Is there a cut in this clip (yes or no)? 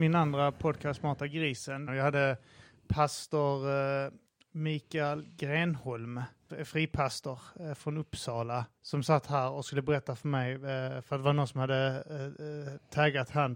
yes